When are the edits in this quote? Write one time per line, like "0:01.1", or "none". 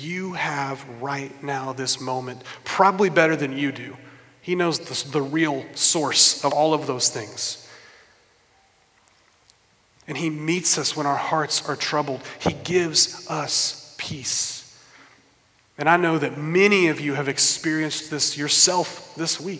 none